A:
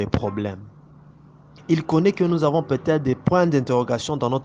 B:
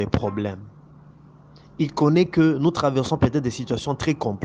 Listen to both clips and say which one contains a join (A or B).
A